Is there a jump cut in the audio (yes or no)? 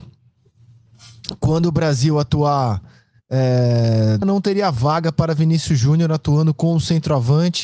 yes